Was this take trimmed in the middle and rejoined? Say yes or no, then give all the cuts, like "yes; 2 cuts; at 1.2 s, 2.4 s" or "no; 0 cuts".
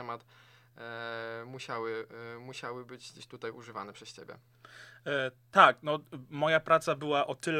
no; 0 cuts